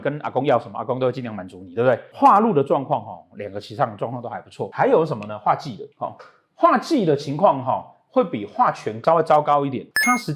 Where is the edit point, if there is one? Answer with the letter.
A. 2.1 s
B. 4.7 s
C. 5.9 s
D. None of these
C